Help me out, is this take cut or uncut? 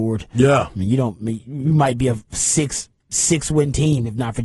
uncut